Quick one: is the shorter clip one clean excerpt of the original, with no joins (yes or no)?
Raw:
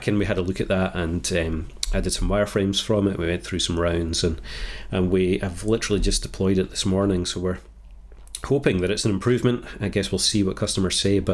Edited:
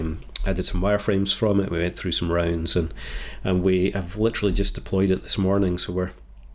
yes